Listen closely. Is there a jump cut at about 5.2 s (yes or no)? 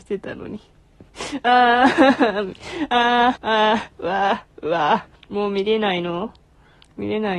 yes